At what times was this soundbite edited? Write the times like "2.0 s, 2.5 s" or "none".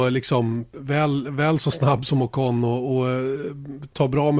none